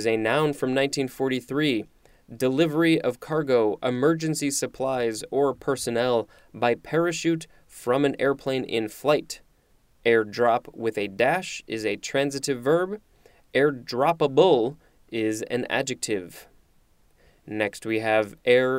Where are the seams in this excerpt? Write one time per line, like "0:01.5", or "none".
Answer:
none